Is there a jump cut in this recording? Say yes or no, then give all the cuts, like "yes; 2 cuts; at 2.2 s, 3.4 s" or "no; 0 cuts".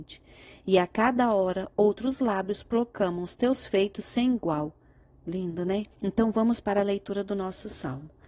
yes; 1 cut; at 5.9 s